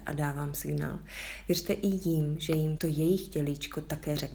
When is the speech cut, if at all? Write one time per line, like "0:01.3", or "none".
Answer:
0:02.8

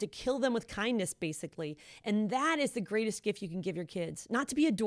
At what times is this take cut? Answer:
none

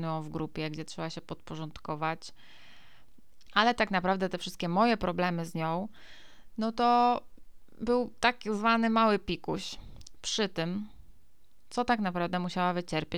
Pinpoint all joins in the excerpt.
0:03.5

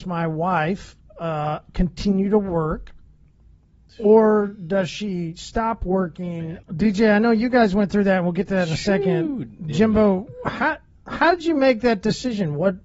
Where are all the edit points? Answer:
0:06.6

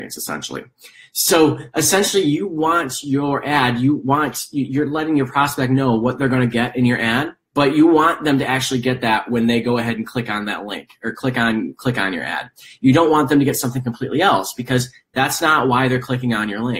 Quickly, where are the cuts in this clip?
0:07.5

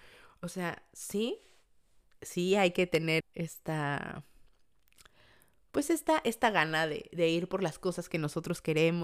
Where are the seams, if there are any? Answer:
0:03.2
0:07.1

